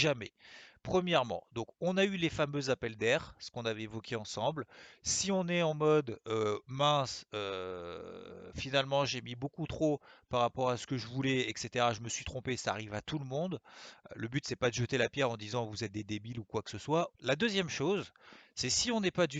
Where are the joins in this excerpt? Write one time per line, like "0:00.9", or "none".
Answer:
0:17.1